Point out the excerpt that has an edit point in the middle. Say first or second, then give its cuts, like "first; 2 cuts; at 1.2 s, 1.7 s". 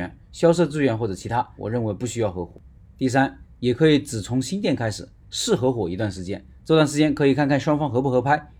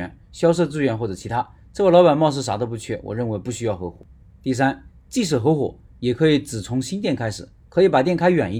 first; 3 cuts; at 1.6 s, 3.6 s, 5.2 s